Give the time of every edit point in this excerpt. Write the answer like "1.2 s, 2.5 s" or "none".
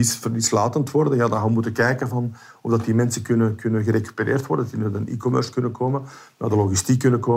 none